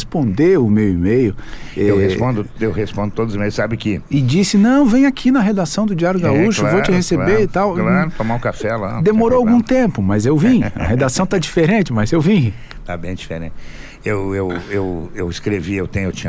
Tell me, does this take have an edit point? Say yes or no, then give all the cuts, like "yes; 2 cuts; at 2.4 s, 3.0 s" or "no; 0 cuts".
no; 0 cuts